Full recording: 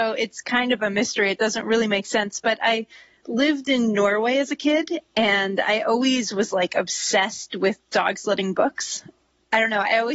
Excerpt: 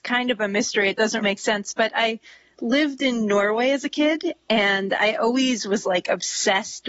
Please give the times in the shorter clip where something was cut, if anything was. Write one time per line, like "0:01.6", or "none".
0:01.2